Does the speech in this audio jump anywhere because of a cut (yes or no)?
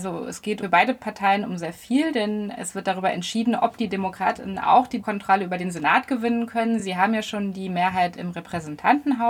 no